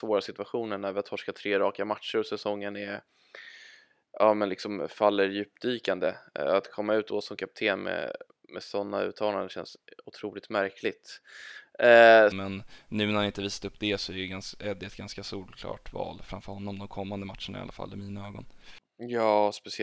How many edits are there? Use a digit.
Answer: 1